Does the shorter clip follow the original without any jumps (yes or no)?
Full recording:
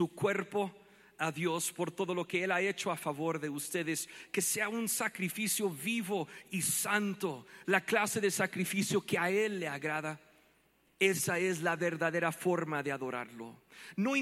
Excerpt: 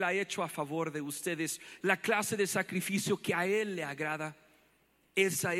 no